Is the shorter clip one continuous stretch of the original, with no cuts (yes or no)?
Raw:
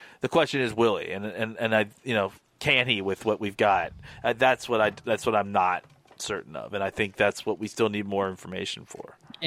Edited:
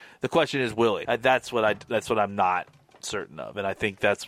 no